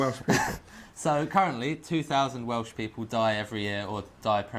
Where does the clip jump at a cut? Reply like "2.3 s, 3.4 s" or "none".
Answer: none